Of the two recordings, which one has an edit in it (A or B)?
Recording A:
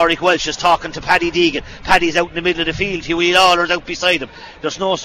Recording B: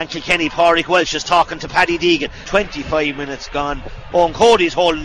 B